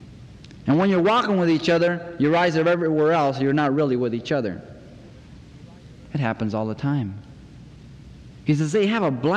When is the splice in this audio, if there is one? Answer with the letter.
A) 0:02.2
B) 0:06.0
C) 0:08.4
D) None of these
B